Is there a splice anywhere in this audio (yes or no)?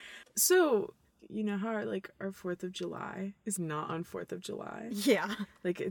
yes